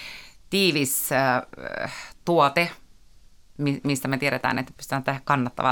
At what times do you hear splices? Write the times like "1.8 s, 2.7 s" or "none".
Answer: none